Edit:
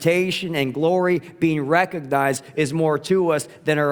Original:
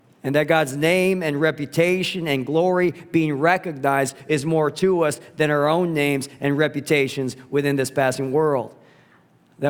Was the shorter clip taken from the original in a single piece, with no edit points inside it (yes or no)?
yes